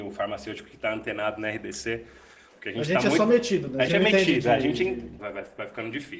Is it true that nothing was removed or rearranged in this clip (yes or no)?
no